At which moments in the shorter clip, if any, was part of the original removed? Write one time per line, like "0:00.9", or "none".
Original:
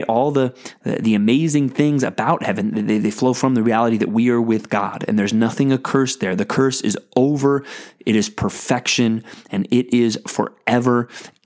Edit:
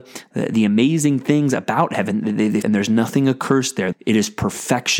0:02.6
0:03.9